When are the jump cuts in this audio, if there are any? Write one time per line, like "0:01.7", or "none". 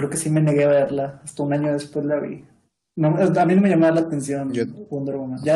none